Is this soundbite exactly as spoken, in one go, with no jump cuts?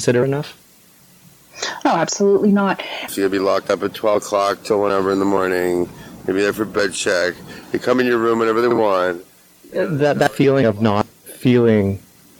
no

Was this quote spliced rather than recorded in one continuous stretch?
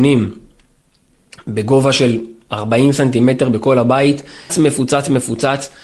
yes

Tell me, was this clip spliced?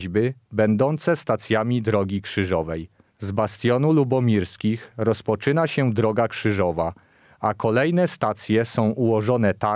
no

